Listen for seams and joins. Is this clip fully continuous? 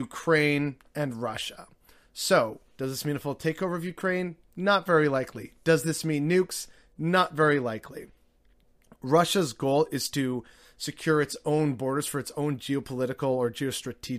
yes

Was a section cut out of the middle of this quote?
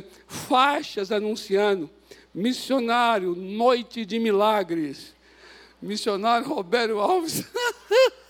no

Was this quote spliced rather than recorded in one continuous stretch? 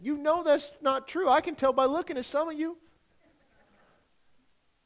no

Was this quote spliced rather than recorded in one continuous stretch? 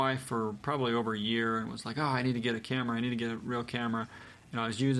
no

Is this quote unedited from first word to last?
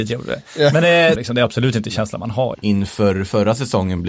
no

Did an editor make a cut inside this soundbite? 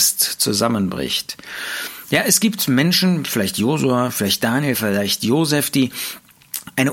no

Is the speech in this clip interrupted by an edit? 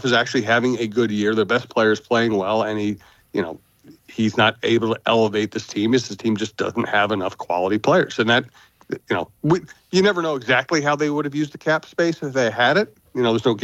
no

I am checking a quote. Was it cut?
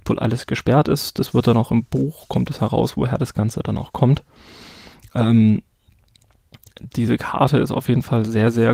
yes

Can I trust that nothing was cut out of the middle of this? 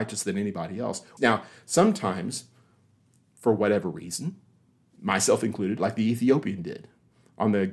no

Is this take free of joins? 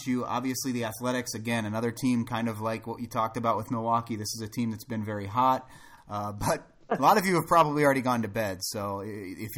no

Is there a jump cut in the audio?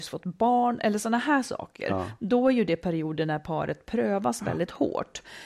no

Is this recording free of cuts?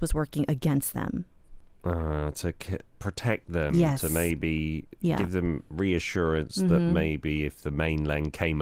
yes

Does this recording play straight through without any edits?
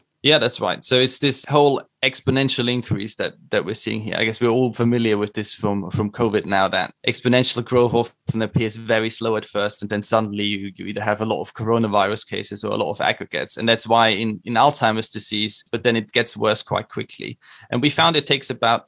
no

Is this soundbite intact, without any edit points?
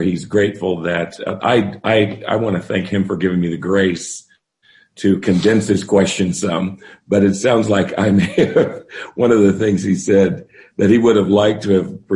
yes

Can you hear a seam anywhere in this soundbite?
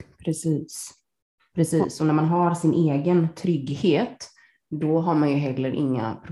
no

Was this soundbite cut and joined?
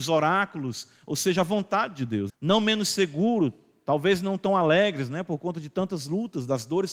yes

